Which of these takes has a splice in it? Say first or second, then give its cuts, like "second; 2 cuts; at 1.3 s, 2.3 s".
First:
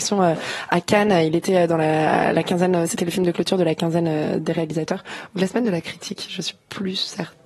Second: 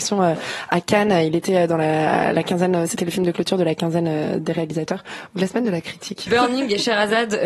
second; 1 cut; at 6.3 s